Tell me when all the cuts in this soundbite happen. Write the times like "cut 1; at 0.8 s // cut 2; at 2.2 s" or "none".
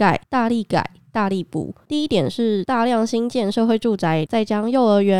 cut 1; at 4.3 s

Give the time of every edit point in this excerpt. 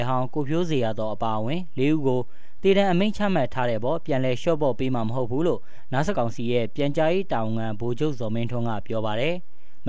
cut 1; at 6.1 s

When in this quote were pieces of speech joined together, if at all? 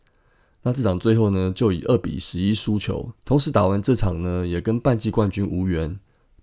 cut 1; at 3.2 s

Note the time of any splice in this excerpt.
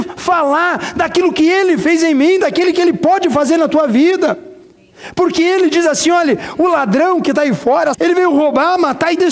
cut 1; at 7.9 s

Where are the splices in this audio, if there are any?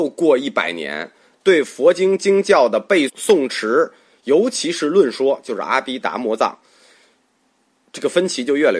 cut 1; at 3.1 s

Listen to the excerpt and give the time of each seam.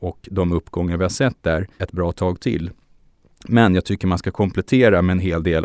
cut 1; at 1.8 s

